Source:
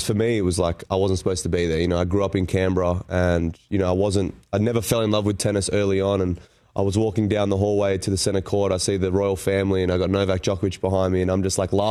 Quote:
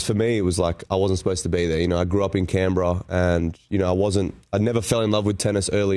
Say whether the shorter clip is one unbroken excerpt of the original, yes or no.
yes